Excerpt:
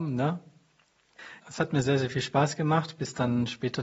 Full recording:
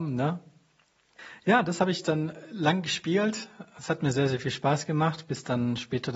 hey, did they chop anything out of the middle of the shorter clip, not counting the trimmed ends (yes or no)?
yes